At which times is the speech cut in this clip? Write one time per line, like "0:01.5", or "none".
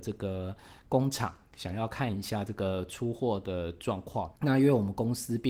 0:04.4